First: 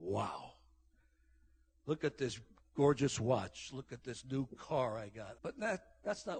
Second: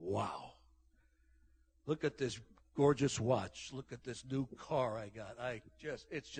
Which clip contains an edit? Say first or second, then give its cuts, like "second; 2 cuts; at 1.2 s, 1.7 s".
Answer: first; 1 cut; at 5.3 s